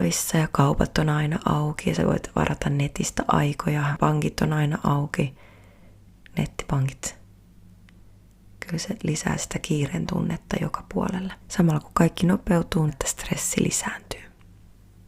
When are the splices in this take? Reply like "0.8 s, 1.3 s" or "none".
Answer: 11.4 s, 12.9 s